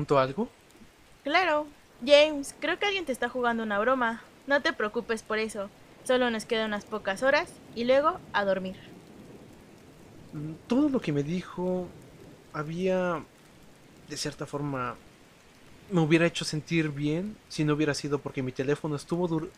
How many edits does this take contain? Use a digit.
1